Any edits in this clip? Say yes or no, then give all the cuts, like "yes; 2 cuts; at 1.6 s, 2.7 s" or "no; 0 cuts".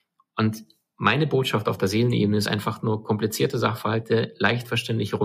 no; 0 cuts